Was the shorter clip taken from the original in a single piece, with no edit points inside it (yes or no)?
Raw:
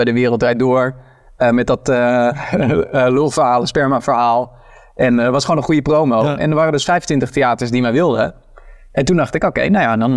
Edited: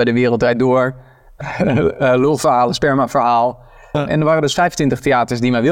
no